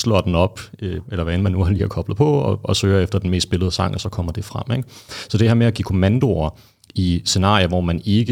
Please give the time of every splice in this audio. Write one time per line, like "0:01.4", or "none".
0:01.1